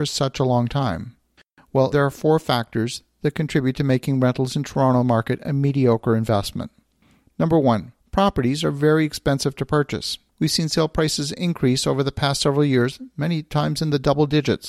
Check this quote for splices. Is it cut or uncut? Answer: cut